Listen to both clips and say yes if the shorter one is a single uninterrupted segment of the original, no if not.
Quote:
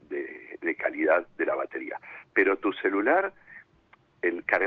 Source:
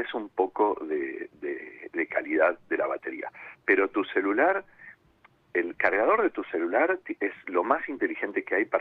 yes